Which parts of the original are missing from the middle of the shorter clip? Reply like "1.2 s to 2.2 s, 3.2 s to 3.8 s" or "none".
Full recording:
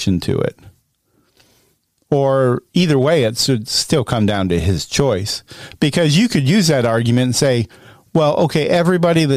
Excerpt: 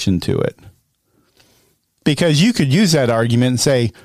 2.0 s to 5.8 s